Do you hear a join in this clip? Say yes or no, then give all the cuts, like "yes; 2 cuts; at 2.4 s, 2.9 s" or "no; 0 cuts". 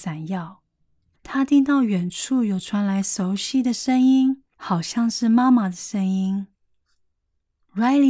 yes; 2 cuts; at 1.1 s, 4.5 s